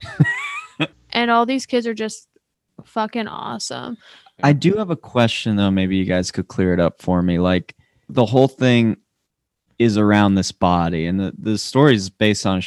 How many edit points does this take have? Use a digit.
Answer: 2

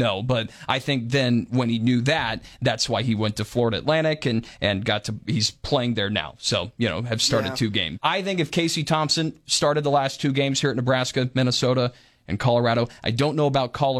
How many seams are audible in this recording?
1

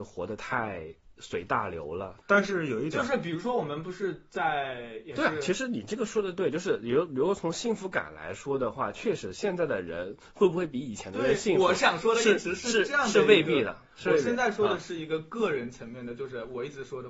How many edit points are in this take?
1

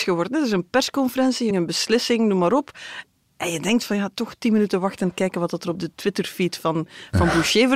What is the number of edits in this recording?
1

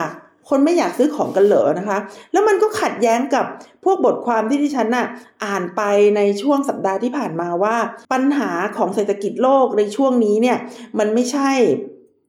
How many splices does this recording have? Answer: 1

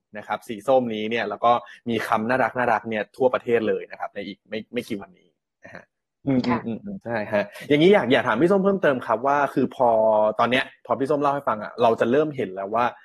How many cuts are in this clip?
1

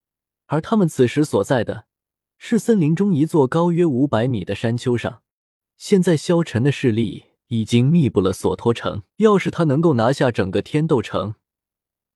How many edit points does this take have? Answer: 2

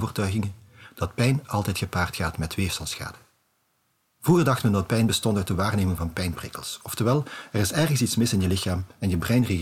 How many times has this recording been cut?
0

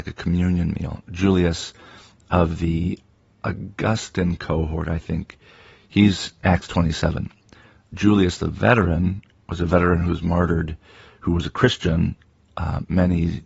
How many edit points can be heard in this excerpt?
0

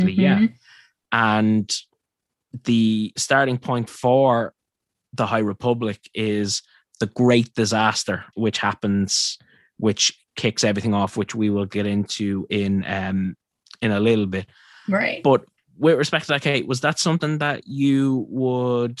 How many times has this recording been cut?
1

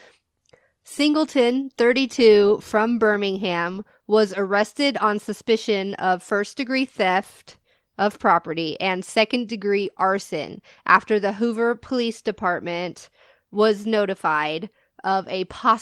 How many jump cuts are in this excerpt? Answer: 0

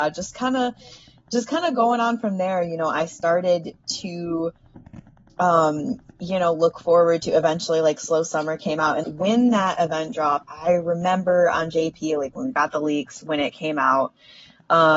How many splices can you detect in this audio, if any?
2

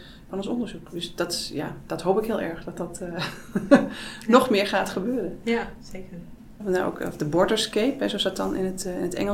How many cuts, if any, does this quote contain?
1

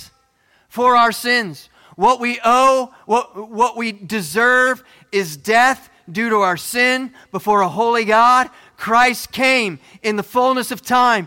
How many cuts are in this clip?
0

